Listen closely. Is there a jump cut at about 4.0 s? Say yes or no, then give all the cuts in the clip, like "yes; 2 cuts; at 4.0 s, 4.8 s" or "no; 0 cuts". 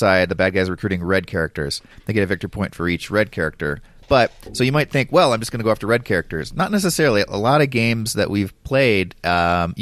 no; 0 cuts